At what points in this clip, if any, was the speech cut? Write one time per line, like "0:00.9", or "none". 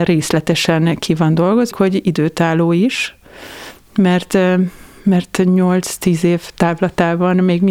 0:01.7